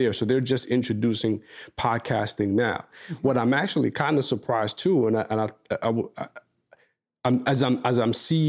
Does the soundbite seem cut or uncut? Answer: uncut